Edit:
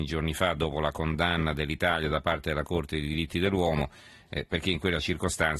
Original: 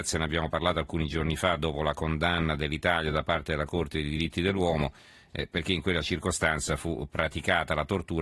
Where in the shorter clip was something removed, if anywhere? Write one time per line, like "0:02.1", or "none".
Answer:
none